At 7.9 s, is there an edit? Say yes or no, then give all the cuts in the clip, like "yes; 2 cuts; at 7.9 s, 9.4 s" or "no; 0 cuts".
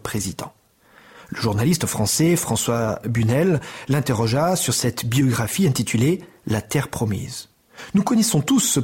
no; 0 cuts